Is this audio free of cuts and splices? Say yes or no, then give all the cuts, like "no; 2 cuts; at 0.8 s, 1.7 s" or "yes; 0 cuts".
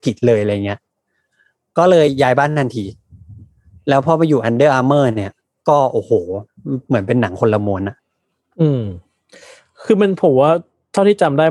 yes; 0 cuts